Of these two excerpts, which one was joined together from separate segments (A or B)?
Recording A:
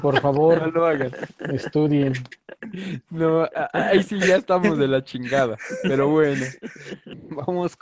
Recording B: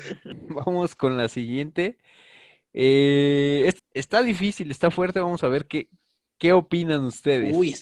B